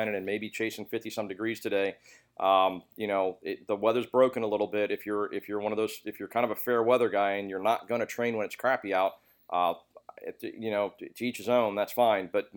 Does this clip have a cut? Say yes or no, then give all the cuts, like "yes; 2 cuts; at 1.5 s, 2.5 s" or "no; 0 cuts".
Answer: no; 0 cuts